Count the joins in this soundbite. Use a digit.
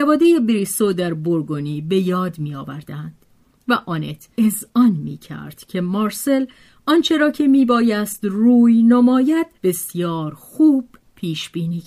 2